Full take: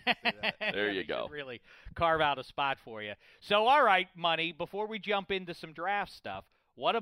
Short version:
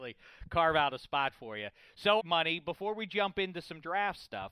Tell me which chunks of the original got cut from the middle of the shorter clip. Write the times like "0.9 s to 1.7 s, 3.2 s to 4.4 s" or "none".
3.6 s to 4.1 s